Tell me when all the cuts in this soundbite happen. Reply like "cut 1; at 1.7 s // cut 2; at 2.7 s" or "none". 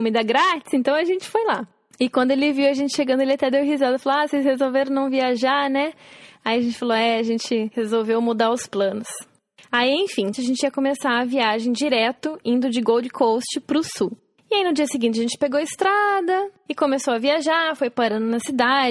cut 1; at 10.3 s